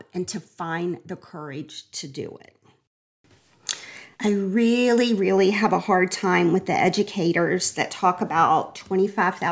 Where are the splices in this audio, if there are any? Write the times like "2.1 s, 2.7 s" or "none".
4.2 s